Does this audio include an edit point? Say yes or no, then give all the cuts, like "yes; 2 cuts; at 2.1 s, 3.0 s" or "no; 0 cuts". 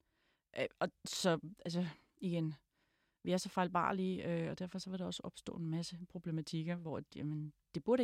no; 0 cuts